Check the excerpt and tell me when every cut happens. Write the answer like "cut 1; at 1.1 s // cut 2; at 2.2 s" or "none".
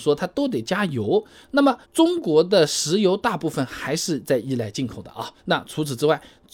cut 1; at 1.8 s // cut 2; at 5.4 s

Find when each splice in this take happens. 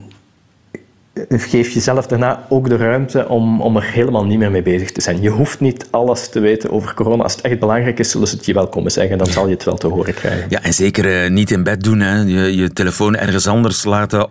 none

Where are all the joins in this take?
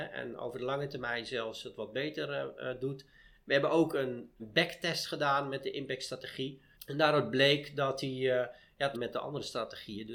cut 1; at 4.4 s // cut 2; at 6.7 s // cut 3; at 8.9 s

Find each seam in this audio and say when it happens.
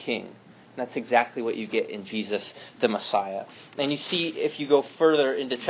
none

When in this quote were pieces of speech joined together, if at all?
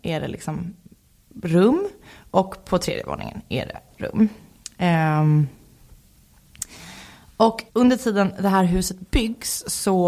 cut 1; at 7.7 s

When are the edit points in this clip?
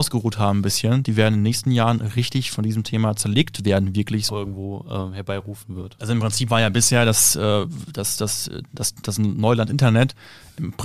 cut 1; at 4.3 s

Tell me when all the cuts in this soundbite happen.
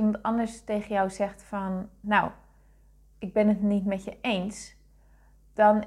cut 1; at 2.0 s

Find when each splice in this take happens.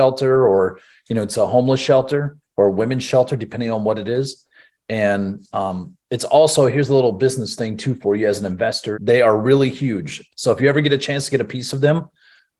cut 1; at 8.9 s

